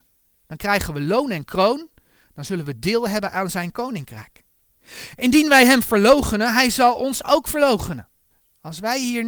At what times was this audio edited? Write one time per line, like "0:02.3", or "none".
none